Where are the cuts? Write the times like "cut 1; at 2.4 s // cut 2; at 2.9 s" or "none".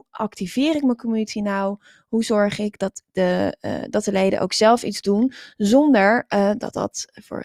none